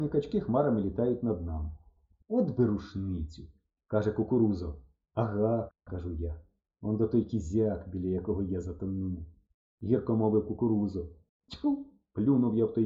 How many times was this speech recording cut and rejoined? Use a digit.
1